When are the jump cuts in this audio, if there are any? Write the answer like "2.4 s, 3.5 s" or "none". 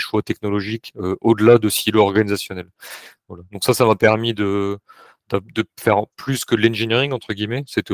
none